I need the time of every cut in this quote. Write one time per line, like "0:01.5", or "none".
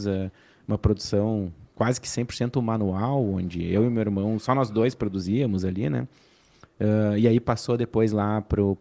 0:04.4